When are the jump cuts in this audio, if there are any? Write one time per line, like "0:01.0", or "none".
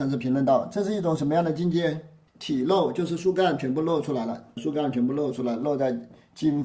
0:02.3
0:04.6